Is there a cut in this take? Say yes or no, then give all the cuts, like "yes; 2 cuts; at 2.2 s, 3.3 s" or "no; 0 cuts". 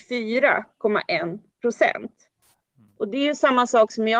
no; 0 cuts